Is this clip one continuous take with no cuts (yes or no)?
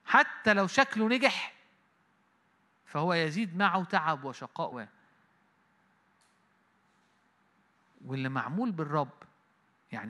no